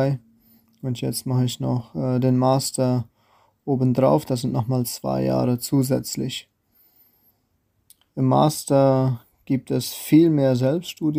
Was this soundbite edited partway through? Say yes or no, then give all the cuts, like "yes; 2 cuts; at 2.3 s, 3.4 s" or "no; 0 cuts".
no; 0 cuts